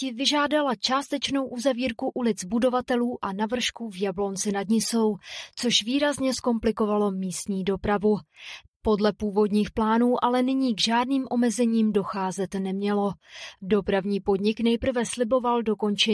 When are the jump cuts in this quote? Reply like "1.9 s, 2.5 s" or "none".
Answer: 8.6 s, 13.5 s